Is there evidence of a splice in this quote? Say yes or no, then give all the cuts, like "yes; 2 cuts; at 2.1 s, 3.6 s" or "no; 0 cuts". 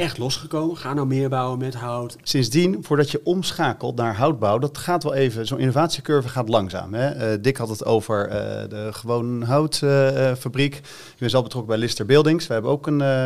yes; 1 cut; at 2.2 s